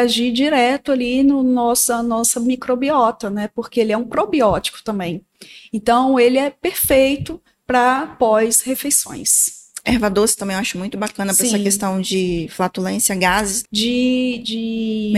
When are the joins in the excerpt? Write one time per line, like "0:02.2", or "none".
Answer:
0:13.6